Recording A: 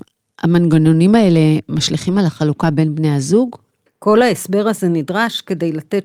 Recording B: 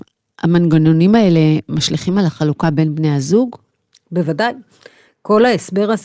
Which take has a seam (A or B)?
A